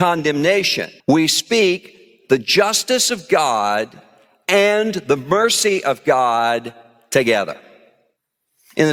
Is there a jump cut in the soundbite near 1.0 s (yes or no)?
yes